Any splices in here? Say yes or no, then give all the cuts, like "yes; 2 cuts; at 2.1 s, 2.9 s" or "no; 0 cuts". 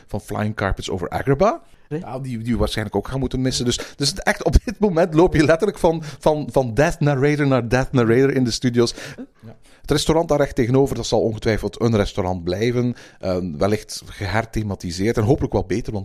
yes; 2 cuts; at 1.9 s, 9.2 s